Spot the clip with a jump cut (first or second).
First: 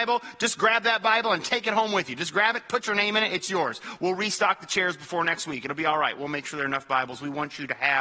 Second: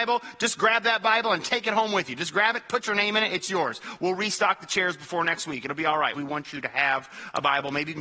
second